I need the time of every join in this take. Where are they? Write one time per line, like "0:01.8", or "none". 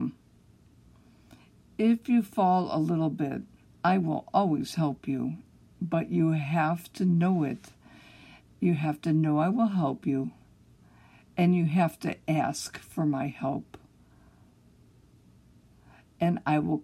0:03.7